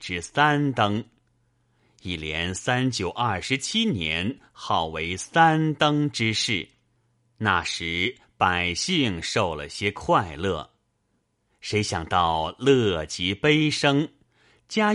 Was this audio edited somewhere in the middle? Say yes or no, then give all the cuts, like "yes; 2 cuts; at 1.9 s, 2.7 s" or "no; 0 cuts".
no; 0 cuts